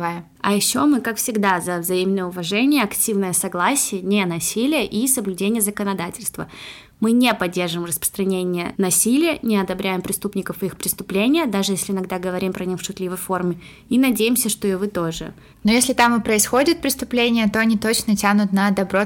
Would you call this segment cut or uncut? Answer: cut